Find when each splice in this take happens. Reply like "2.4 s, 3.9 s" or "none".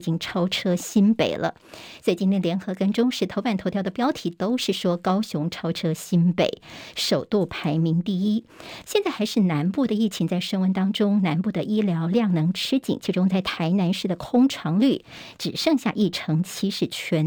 8.8 s